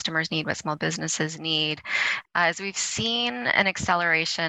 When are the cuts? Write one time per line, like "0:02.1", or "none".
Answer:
none